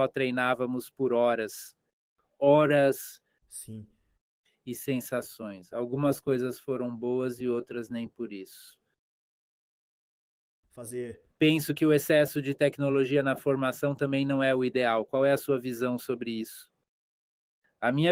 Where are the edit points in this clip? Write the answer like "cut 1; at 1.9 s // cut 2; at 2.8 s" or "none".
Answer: none